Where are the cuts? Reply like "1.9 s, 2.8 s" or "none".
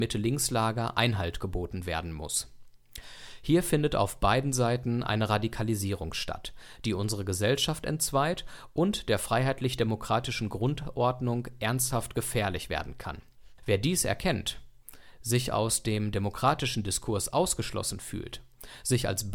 13.6 s